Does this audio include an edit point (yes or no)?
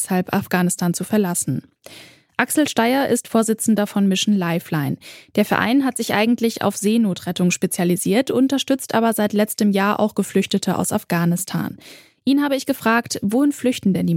no